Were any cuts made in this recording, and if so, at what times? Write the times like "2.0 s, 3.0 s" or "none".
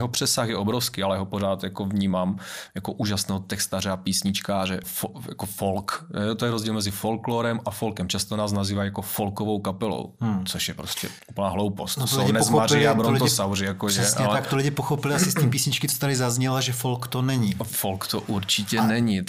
4.8 s